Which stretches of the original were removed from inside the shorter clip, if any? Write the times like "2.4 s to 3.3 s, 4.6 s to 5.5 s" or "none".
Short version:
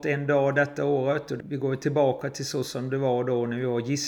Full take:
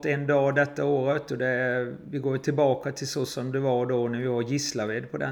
1.4 s to 2.0 s